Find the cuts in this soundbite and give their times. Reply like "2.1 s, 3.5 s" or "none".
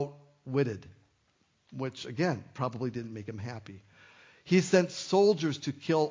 none